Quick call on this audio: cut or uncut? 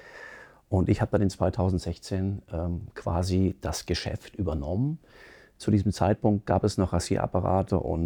uncut